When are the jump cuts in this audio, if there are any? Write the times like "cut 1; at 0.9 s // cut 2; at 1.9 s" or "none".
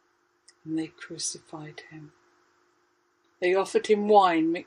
cut 1; at 3.2 s